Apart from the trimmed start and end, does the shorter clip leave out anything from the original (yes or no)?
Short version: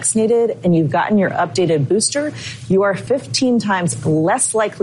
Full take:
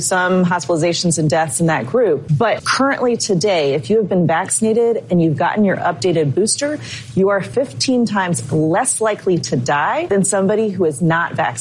no